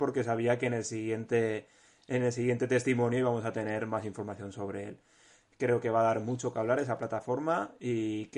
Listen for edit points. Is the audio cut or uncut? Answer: uncut